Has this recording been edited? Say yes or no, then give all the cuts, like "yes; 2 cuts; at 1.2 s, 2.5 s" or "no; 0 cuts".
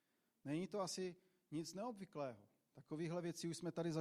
no; 0 cuts